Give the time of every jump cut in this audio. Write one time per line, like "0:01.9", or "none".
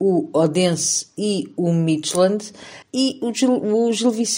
0:02.8